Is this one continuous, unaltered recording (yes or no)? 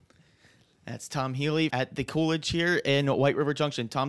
no